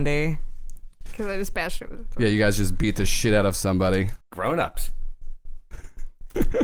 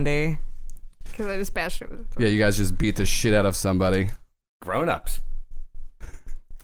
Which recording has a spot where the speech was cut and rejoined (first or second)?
first